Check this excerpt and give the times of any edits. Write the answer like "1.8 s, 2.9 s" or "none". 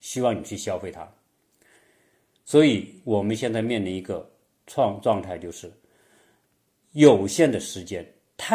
none